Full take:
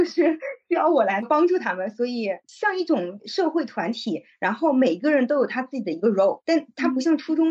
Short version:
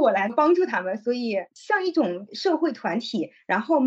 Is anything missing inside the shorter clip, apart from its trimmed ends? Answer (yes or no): no